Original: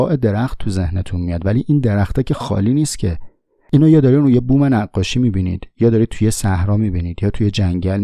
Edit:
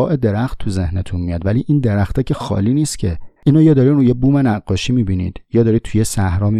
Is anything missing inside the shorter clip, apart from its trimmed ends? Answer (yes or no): yes